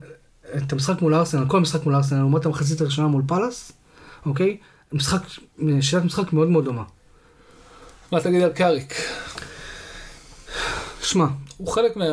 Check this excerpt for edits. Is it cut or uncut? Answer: uncut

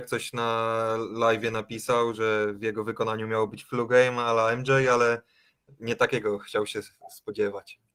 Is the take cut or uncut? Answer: uncut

